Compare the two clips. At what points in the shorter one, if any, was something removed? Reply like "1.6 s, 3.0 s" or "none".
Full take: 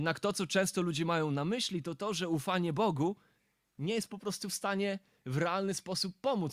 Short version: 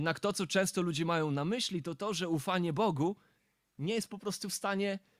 none